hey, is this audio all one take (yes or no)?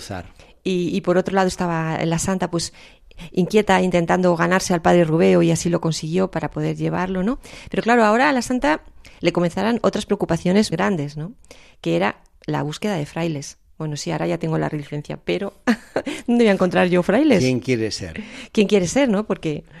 no